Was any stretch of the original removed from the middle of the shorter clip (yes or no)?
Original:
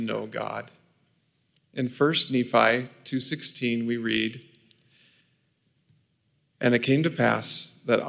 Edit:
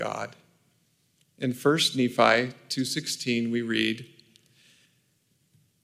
no